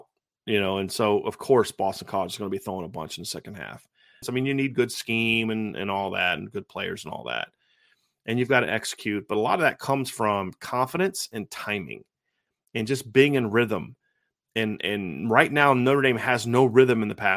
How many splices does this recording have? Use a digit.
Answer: 1